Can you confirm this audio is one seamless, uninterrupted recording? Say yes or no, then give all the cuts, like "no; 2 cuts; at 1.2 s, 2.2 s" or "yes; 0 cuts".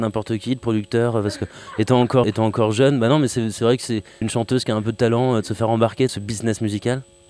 no; 3 cuts; at 2.2 s, 4.2 s, 6.1 s